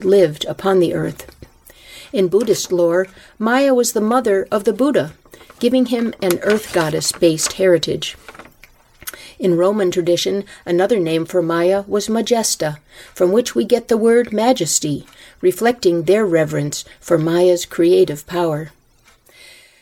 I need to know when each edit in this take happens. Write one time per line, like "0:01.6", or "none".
none